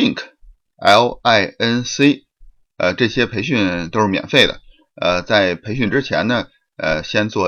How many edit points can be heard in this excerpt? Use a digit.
0